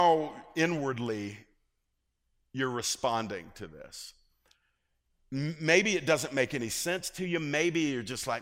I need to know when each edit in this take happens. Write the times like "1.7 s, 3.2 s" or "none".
none